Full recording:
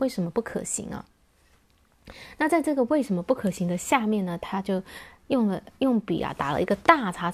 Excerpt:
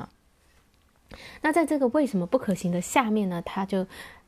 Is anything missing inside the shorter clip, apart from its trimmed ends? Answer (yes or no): no